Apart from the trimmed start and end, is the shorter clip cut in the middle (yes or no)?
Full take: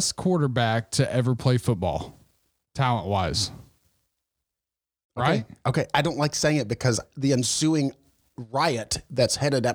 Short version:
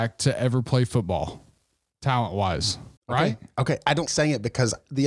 yes